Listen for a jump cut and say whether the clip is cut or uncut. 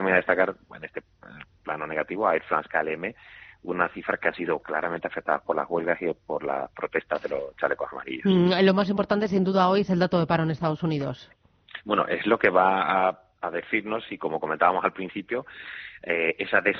uncut